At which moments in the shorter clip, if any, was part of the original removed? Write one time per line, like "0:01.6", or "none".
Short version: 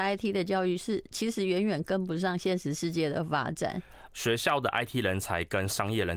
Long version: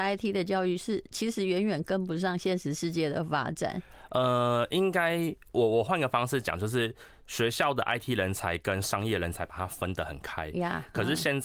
0:04.1